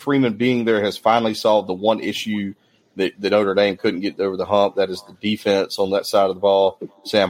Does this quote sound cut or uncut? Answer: uncut